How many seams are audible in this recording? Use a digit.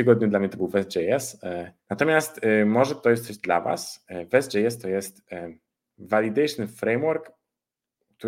1